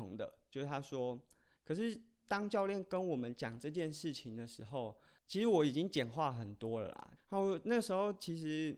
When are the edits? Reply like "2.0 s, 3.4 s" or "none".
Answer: 1.5 s, 7.2 s